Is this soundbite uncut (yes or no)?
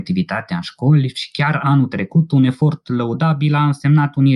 yes